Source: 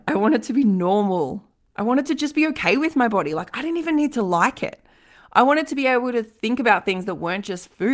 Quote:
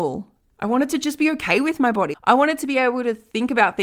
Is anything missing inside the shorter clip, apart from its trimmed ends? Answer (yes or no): yes